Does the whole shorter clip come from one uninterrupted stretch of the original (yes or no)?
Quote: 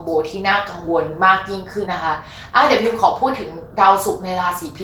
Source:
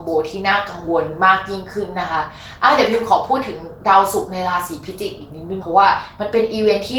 no